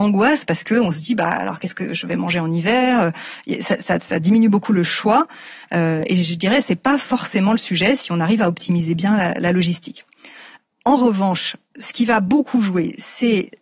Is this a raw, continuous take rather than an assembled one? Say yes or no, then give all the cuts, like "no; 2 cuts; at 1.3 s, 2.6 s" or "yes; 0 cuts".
yes; 0 cuts